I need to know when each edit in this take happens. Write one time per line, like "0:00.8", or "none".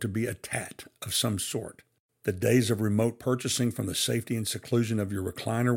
none